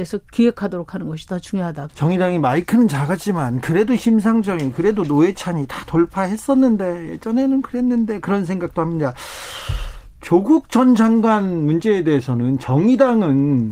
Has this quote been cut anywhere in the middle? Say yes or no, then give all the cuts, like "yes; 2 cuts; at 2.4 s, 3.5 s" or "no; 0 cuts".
yes; 1 cut; at 1.9 s